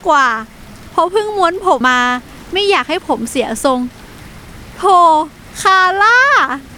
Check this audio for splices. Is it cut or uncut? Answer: cut